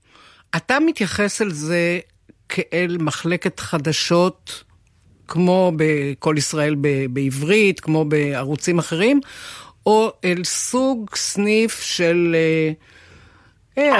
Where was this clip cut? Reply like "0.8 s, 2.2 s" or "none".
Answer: none